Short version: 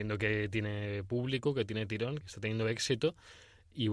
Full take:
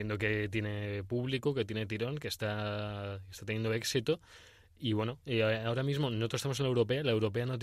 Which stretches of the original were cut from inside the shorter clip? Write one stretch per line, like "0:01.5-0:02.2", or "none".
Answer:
0:02.2-0:03.3